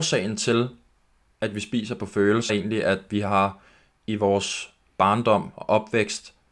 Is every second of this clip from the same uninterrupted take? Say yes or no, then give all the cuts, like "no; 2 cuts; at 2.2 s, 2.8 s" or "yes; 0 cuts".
no; 1 cut; at 2.5 s